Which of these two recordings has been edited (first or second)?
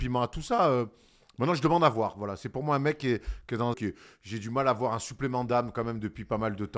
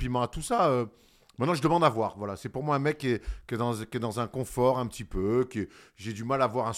first